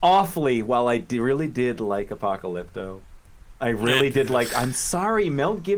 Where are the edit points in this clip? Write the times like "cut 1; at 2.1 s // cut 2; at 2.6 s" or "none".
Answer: none